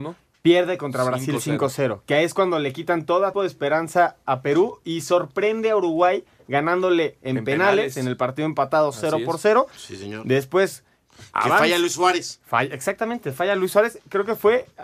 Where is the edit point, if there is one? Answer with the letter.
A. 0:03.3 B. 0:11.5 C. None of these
A